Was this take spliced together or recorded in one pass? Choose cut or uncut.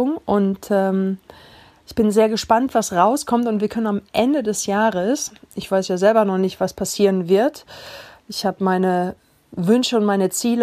uncut